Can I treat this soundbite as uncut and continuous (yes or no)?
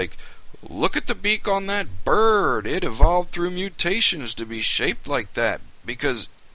yes